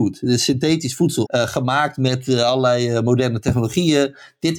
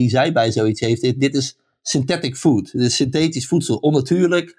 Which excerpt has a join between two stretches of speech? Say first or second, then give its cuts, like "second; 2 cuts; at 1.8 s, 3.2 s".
first; 1 cut; at 1.2 s